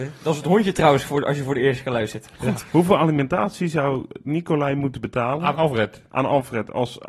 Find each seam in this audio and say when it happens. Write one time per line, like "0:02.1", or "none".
none